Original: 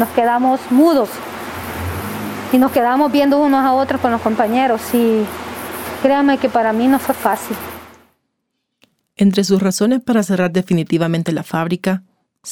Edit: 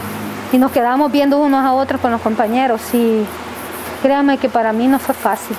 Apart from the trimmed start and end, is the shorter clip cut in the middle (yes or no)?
no